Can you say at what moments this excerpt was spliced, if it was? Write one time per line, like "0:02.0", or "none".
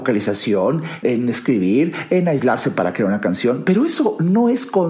0:01.0